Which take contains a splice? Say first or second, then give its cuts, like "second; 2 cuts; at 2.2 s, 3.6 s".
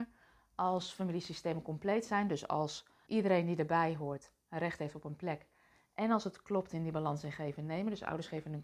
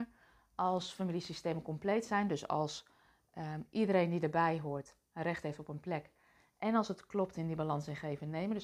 first; 1 cut; at 3.1 s